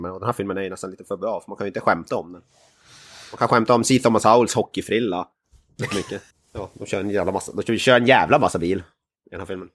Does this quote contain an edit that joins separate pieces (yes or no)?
yes